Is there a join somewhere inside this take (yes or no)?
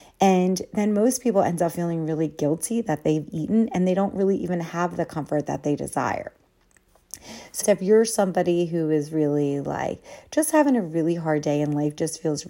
yes